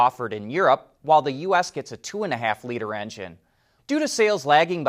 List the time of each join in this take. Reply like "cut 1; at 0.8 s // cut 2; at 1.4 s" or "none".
cut 1; at 3.8 s